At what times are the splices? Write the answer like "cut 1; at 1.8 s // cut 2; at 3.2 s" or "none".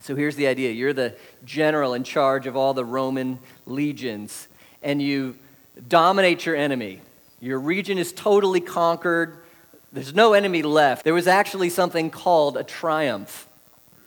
cut 1; at 11.0 s